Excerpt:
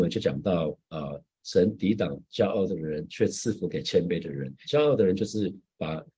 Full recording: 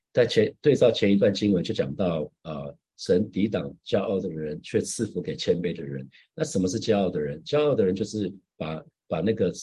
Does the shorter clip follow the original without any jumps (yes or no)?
no